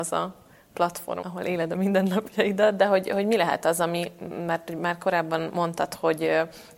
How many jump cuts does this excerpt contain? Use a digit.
1